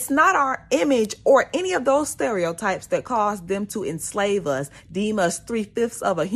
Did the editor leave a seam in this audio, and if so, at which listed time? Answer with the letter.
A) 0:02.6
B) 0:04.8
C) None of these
C